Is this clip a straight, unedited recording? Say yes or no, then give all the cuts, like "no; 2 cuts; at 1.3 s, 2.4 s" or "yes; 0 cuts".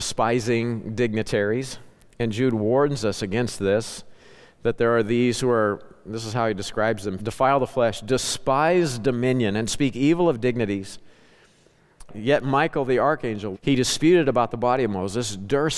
no; 3 cuts; at 7.2 s, 12.1 s, 13.5 s